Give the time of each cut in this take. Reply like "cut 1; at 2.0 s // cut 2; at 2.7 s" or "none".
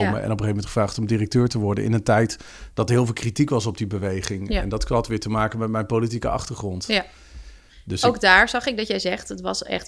none